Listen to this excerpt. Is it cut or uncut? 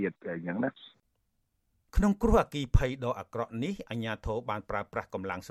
uncut